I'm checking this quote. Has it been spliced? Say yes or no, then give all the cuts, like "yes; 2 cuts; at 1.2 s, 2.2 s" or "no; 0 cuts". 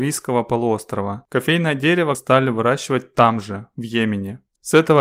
yes; 1 cut; at 2.1 s